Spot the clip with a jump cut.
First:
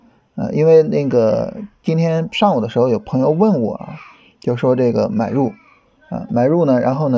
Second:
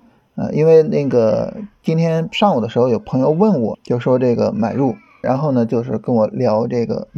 second; 2 cuts; at 3.7 s, 5.2 s

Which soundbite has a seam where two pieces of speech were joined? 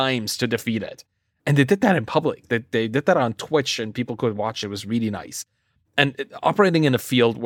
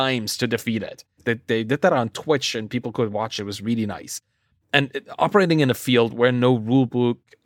second; 1 cut; at 1.2 s

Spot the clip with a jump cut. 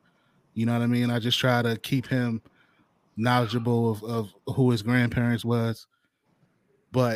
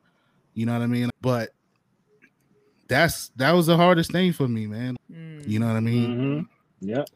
second; 2 cuts; at 1.1 s, 5.0 s

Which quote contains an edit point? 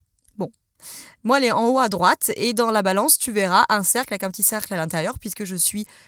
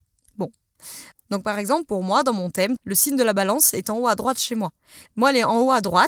second; 3 cuts; at 1.1 s, 2.8 s, 5.1 s

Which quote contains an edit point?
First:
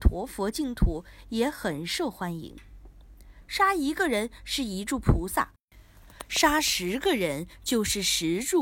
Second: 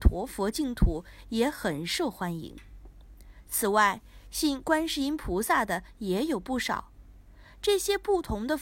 first; 1 cut; at 3.4 s

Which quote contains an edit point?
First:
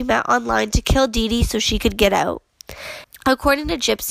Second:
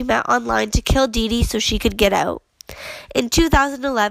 first; 1 cut; at 3.0 s

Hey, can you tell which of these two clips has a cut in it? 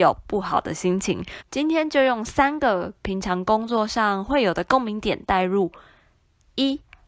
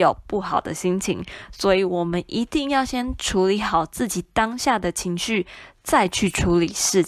first; 1 cut; at 1.4 s

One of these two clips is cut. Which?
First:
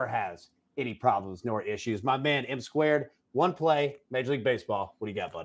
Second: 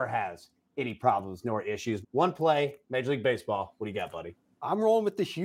second; 1 cut; at 2.0 s

